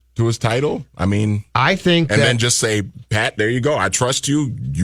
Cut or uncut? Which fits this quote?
uncut